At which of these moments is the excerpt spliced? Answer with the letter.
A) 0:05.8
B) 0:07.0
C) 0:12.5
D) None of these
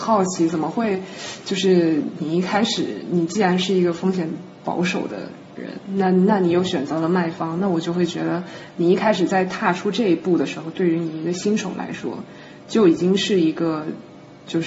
D